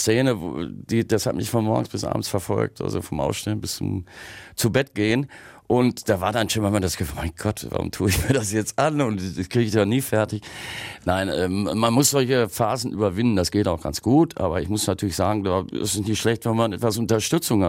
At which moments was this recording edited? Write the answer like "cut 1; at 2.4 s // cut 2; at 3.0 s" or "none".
none